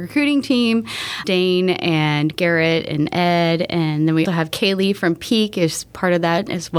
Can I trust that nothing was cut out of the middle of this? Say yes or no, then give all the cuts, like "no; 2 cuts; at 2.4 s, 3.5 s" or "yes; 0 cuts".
no; 2 cuts; at 1.2 s, 4.3 s